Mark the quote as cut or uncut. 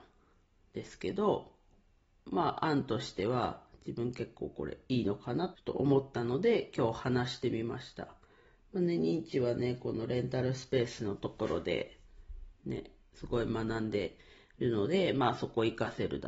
cut